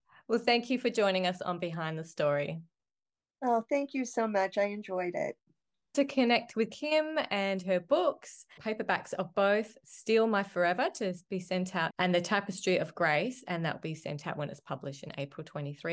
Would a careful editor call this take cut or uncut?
cut